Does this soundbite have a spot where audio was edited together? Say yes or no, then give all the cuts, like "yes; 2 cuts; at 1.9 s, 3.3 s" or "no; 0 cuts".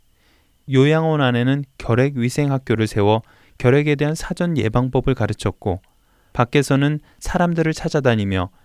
no; 0 cuts